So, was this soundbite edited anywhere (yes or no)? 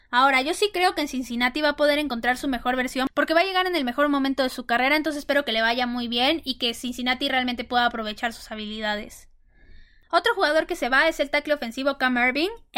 no